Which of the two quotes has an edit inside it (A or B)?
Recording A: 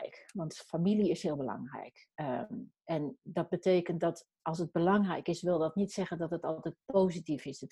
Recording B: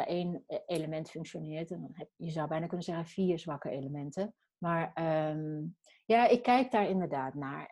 B